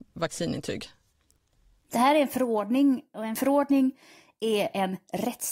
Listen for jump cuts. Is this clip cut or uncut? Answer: uncut